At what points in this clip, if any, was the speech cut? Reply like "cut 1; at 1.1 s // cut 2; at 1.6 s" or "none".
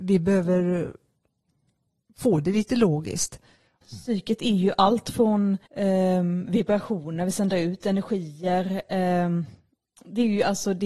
cut 1; at 3.8 s // cut 2; at 5.7 s